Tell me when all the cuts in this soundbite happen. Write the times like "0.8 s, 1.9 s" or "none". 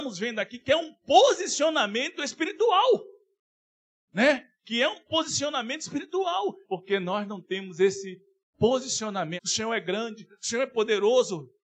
6.6 s, 9.4 s